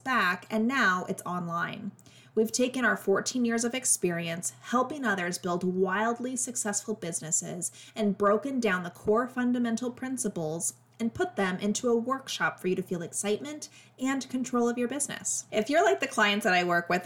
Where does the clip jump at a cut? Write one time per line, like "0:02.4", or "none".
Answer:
0:15.5